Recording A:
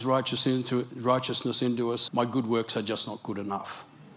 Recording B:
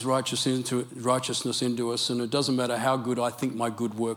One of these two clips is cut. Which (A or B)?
A